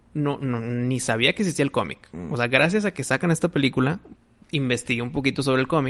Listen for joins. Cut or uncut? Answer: uncut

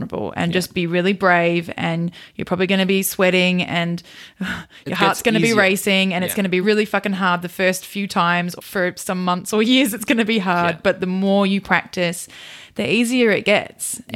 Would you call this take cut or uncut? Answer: cut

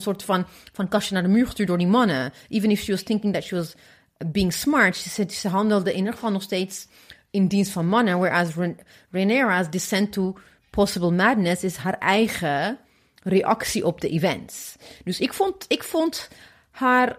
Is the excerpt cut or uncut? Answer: uncut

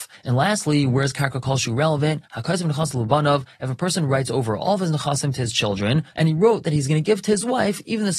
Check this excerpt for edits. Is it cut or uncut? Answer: cut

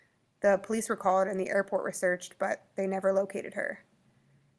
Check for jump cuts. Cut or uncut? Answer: uncut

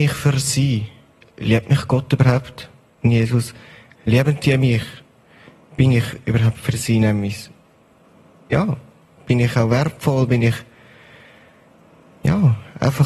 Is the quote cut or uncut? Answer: cut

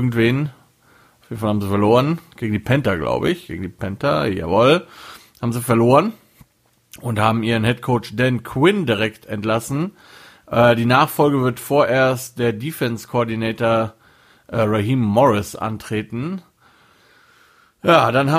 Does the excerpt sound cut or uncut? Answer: uncut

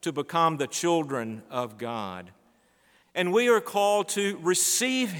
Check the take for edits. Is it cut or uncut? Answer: cut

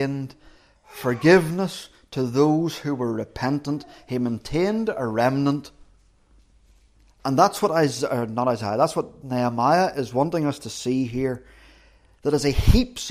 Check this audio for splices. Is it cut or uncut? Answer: uncut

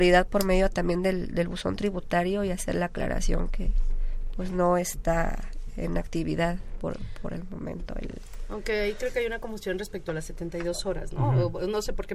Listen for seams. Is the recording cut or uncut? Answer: uncut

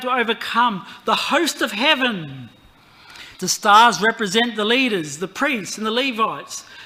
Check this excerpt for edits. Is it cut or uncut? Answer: cut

